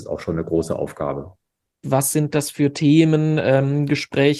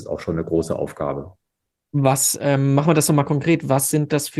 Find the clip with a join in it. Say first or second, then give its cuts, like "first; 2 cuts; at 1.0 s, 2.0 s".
first; 1 cut; at 1.8 s